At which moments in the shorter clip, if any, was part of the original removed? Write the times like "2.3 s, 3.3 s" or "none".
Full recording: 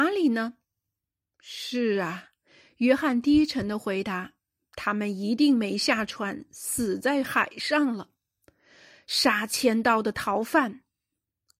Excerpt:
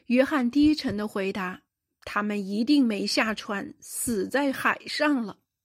none